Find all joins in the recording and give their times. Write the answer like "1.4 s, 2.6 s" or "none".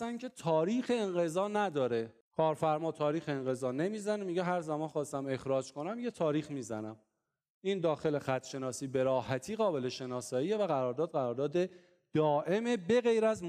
2.2 s